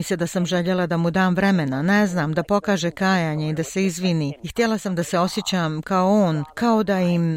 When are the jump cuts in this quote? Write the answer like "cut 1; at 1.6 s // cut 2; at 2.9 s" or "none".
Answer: none